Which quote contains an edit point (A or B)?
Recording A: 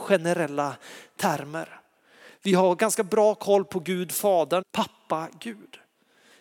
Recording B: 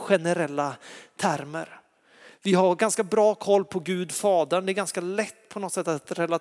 A